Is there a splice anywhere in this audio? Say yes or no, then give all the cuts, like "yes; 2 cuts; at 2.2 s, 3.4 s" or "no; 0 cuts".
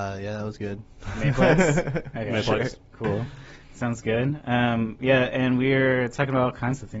no; 0 cuts